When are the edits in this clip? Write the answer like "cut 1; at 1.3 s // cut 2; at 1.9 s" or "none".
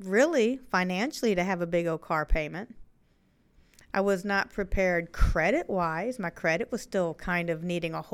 none